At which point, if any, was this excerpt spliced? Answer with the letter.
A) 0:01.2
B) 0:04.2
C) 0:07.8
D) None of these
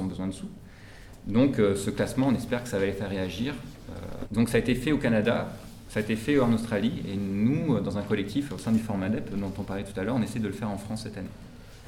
B